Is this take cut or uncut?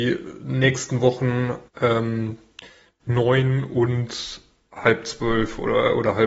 cut